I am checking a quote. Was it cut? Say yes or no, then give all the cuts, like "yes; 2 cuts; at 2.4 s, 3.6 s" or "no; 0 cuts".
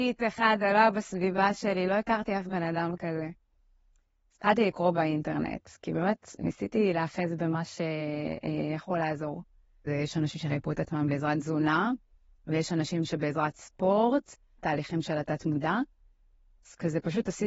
yes; 2 cuts; at 9.9 s, 14.6 s